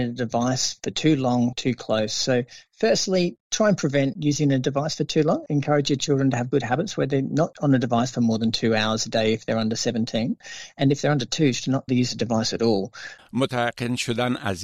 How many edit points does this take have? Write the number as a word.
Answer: two